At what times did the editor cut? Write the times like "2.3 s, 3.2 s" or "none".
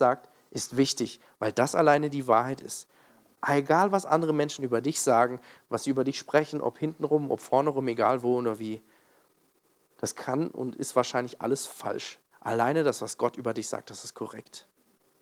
none